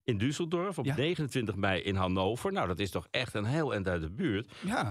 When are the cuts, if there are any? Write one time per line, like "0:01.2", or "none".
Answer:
none